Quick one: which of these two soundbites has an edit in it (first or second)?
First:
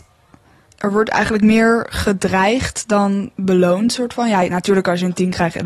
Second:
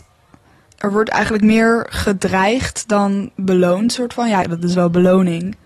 second